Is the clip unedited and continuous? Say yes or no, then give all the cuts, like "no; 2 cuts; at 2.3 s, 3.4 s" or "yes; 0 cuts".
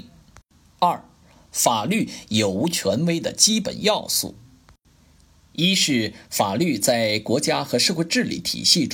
yes; 0 cuts